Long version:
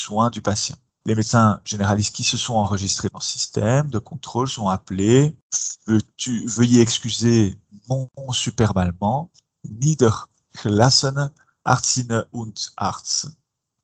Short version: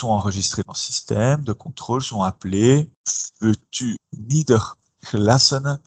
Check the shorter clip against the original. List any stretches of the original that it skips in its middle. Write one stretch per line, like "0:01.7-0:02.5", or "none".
0:06.4-0:09.5